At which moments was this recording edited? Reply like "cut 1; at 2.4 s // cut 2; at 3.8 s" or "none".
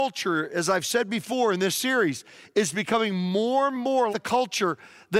cut 1; at 4.1 s